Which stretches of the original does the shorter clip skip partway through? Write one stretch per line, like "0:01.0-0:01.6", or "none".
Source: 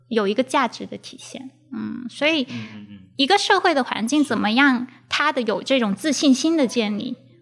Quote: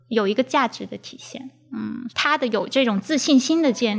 0:02.1-0:05.0